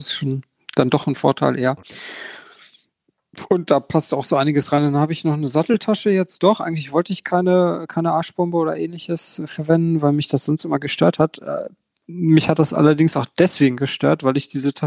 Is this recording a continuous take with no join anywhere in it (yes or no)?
yes